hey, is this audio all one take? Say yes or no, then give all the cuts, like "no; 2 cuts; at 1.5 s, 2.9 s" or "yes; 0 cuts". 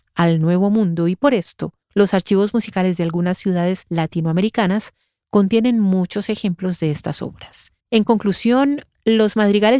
no; 2 cuts; at 1.8 s, 7.8 s